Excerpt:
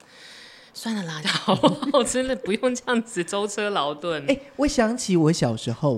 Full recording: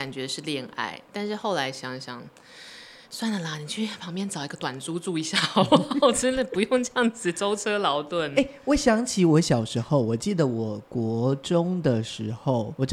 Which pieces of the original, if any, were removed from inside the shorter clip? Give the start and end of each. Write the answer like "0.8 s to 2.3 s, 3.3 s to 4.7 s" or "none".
3.6 s to 5.3 s